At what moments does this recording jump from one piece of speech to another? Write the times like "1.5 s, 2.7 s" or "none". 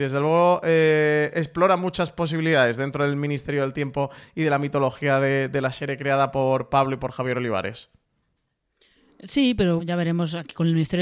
9.8 s